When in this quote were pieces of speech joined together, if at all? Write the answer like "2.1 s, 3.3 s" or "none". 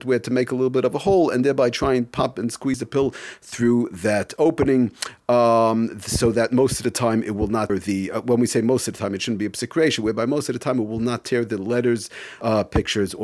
none